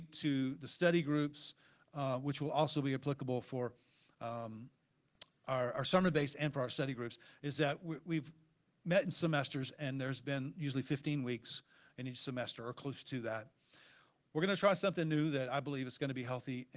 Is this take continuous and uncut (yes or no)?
yes